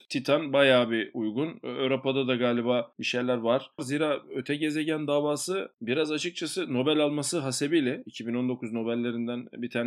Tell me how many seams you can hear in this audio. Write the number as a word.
two